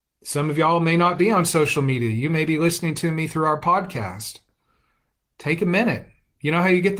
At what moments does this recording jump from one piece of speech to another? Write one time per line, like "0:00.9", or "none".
none